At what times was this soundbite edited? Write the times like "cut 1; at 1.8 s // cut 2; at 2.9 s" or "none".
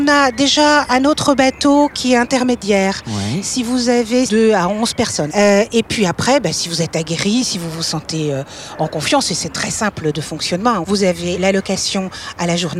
cut 1; at 4.3 s // cut 2; at 5.3 s // cut 3; at 10.8 s